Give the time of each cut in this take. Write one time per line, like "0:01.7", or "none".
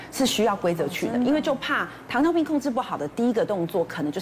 none